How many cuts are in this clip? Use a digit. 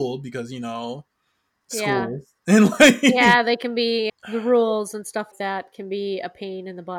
2